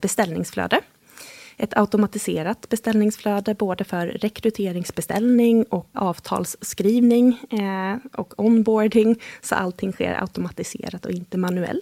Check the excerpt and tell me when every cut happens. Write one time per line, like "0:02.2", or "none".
0:05.9